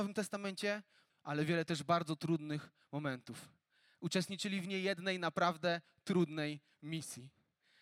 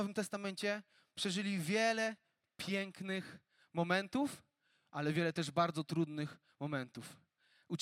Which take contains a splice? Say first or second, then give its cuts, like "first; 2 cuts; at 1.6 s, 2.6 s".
first; 1 cut; at 1.1 s